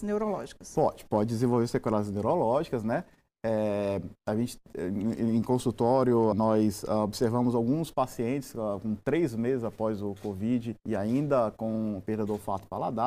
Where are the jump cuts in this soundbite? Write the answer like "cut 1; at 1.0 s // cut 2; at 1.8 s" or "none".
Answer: cut 1; at 6.3 s // cut 2; at 10.8 s